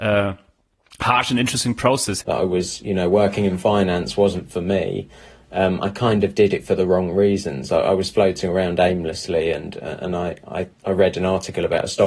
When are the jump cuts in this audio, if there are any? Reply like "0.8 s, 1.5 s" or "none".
2.2 s, 10.7 s